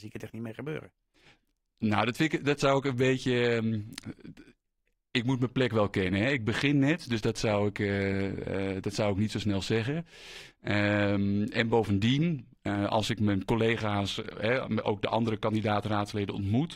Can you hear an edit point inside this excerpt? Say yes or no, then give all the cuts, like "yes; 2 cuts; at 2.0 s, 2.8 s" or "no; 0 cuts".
no; 0 cuts